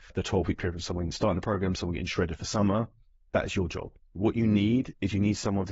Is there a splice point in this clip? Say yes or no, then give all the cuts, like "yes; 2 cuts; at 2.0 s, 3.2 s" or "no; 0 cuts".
yes; 1 cut; at 4.0 s